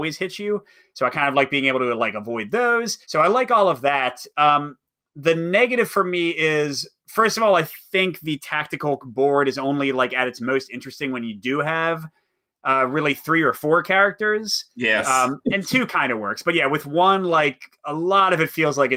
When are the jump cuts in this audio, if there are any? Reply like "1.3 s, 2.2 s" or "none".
3.0 s